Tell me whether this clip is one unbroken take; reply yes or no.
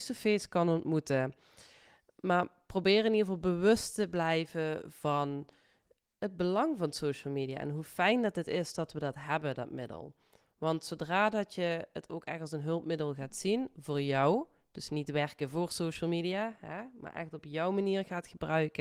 yes